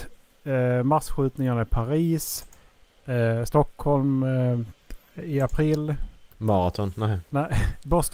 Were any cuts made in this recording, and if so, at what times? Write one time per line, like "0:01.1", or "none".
0:02.9
0:06.3